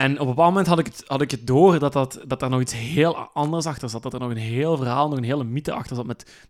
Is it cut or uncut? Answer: uncut